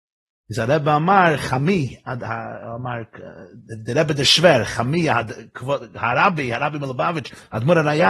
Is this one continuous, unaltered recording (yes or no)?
yes